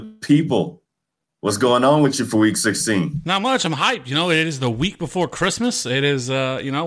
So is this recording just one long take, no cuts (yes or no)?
yes